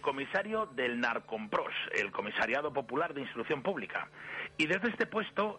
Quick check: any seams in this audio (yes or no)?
no